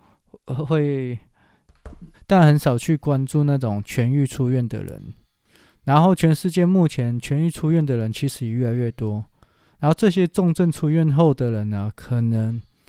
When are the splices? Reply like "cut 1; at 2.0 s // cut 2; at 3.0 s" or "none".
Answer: cut 1; at 2.1 s